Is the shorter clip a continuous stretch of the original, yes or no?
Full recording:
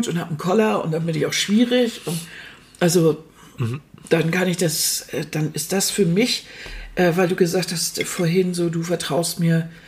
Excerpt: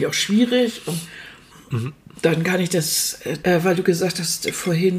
no